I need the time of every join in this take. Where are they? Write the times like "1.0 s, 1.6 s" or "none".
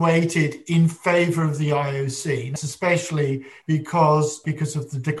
2.6 s